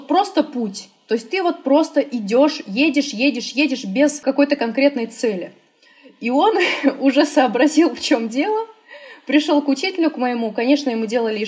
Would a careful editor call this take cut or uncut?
uncut